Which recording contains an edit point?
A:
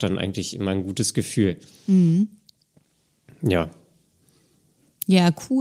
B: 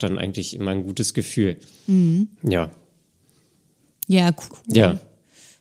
B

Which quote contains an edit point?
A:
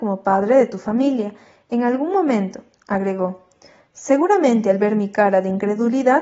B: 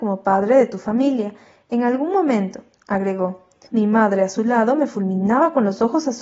B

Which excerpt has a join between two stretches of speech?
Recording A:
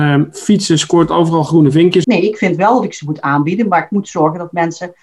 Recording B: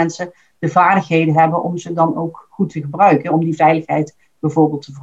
A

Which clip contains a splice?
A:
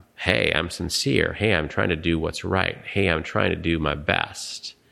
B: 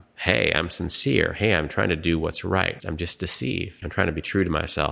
B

